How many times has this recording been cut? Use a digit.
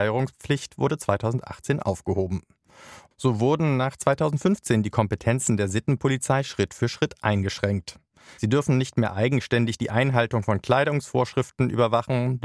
2